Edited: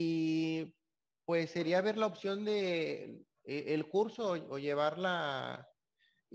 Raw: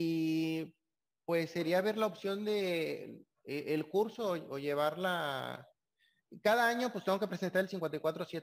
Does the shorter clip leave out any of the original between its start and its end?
no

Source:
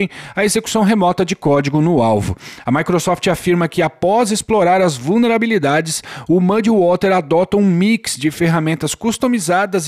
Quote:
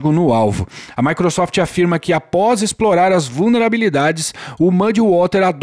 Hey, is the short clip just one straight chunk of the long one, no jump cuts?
yes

